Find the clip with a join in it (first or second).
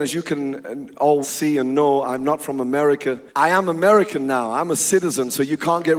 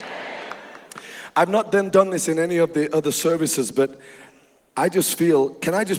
first